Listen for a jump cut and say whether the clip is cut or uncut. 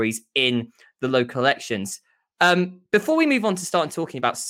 uncut